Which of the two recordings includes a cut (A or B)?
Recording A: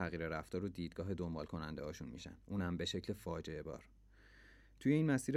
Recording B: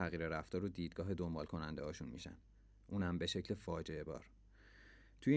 A